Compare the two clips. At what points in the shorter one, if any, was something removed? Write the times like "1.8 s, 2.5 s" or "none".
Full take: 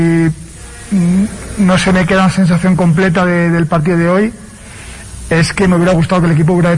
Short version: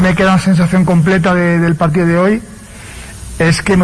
none